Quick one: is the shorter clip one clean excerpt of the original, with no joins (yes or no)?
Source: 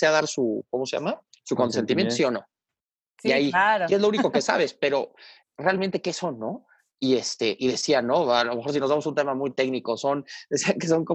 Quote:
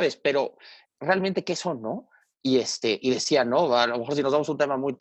yes